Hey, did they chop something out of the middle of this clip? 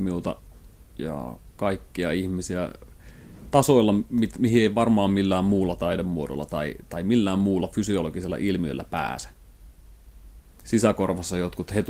no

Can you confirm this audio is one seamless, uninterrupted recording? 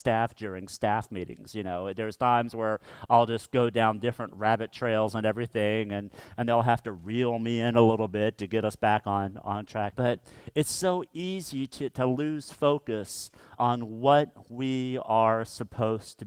no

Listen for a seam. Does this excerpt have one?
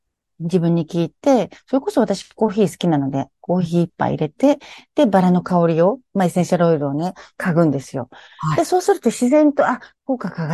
no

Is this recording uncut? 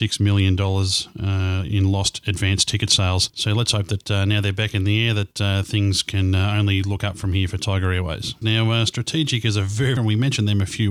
no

